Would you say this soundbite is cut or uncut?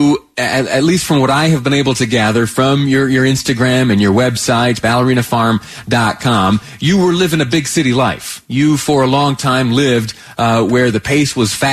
uncut